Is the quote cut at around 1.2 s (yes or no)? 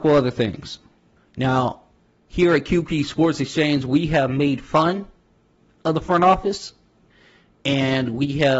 yes